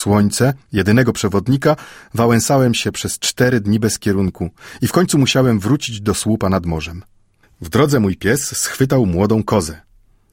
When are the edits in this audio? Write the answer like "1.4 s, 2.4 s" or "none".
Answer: 7.4 s